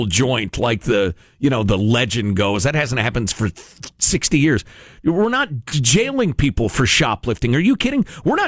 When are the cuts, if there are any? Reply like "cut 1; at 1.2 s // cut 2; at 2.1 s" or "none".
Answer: none